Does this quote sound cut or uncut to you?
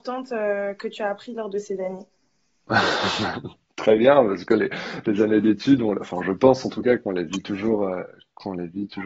uncut